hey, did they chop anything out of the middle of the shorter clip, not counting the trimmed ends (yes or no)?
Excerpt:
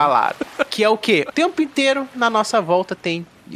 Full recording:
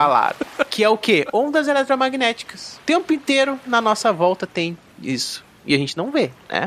yes